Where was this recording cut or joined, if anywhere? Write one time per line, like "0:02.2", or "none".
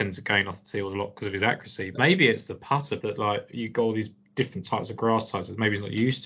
0:01.9
0:03.0